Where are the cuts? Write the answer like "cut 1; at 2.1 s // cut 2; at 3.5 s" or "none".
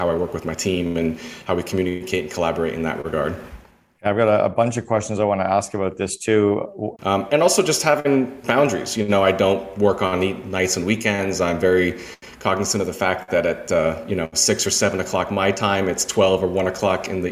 cut 1; at 6.9 s

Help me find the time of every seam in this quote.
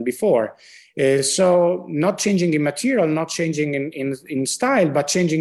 none

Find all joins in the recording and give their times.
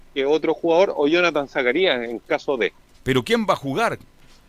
cut 1; at 2.9 s

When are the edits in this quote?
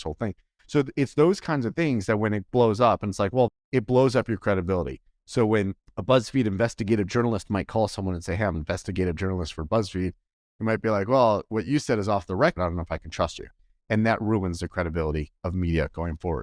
cut 1; at 3.5 s // cut 2; at 12.6 s

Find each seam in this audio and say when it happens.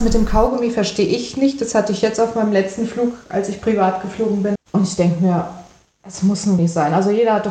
cut 1; at 4.6 s // cut 2; at 6.6 s

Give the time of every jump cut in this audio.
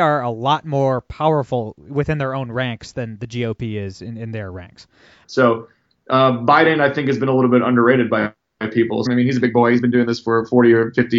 cut 1; at 5.2 s // cut 2; at 9.1 s

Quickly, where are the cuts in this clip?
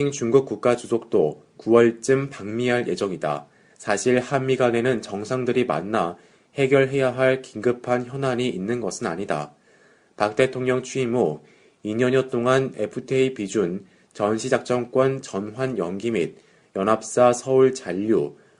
cut 1; at 3.7 s

